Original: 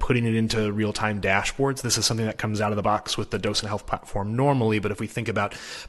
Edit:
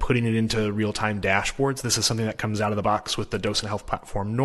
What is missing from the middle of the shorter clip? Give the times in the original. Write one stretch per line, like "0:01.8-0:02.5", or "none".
none